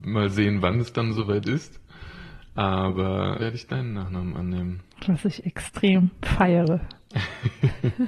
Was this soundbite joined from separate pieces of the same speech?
yes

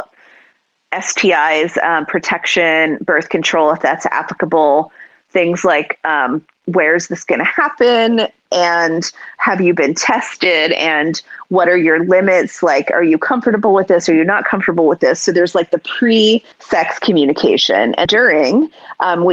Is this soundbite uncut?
no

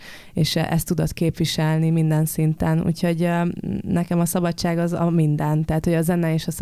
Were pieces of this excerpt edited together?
no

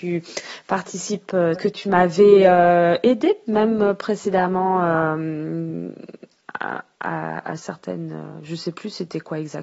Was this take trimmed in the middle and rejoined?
yes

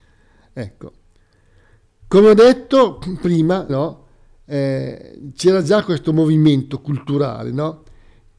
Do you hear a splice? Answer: yes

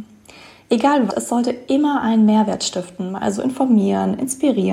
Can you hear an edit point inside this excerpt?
yes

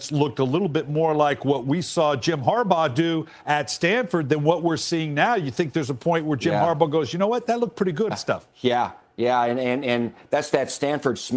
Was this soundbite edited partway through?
yes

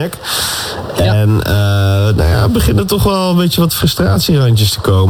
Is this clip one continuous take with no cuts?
yes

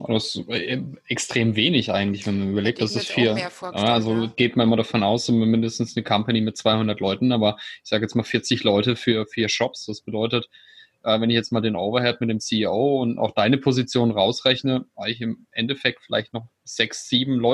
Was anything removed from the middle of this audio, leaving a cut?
no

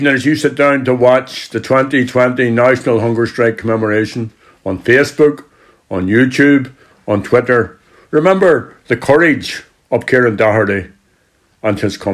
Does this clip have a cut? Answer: no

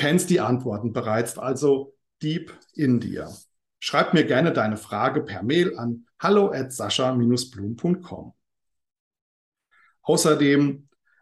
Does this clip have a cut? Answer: yes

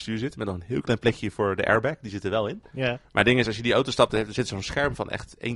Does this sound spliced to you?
yes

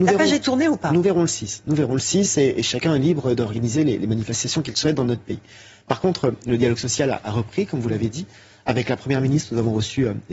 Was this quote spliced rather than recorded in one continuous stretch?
no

